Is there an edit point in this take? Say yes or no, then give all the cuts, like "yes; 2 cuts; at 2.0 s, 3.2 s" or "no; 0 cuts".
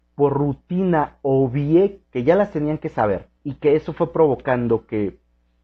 yes; 2 cuts; at 2.0 s, 3.4 s